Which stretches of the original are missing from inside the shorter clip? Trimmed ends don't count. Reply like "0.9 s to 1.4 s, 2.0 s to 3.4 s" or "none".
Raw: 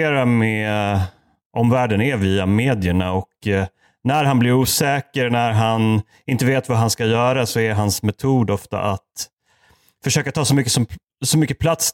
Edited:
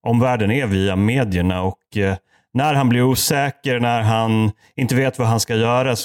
none